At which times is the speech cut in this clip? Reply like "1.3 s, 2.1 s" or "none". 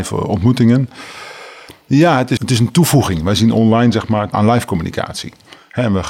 2.4 s, 4.3 s